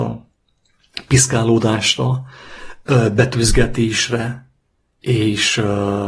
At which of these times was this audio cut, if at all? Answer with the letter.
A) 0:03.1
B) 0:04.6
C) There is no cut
C